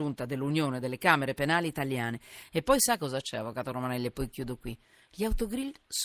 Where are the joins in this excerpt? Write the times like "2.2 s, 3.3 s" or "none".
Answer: none